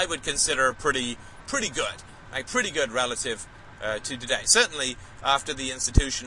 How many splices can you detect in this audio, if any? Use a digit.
0